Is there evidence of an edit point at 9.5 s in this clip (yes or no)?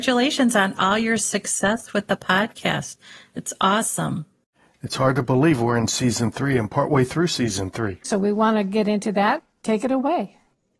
no